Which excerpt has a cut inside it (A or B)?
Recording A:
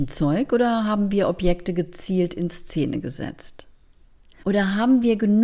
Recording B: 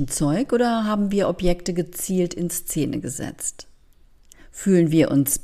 A